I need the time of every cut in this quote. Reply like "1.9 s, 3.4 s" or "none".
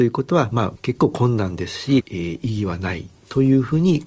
2.0 s